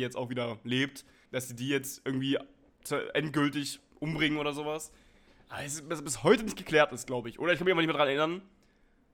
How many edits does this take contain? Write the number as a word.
one